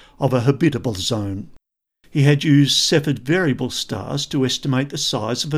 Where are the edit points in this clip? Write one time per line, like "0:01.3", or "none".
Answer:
0:01.9